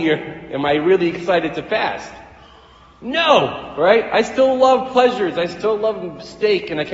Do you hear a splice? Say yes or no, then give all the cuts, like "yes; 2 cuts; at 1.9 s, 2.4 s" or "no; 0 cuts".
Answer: no; 0 cuts